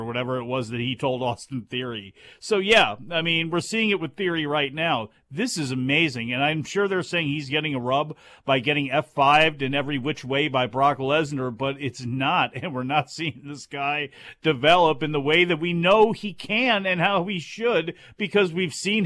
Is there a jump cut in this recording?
no; 0 cuts

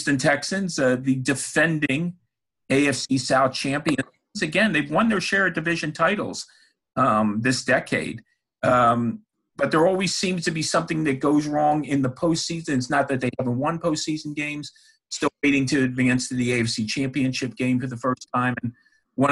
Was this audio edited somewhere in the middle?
no; 0 cuts

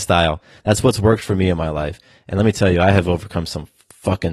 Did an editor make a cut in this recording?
no; 0 cuts

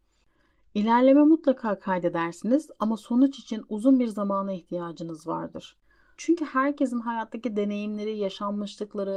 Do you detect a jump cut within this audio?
yes; 1 cut; at 6.2 s

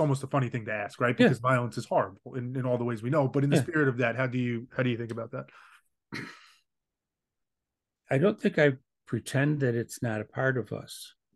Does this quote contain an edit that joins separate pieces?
no; 0 cuts

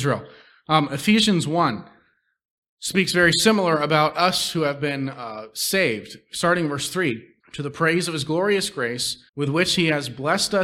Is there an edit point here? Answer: yes; 2 cuts; at 7.4 s, 9.3 s

